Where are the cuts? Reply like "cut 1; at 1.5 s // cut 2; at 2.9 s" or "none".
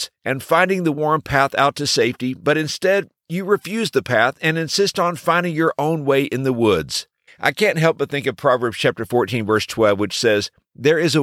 cut 1; at 0.9 s // cut 2; at 7.3 s